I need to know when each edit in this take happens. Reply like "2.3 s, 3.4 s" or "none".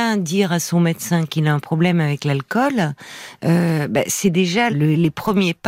4.7 s